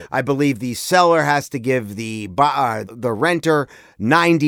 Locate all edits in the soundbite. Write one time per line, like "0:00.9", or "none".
0:02.8